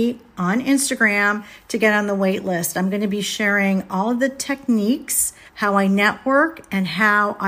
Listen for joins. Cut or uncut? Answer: cut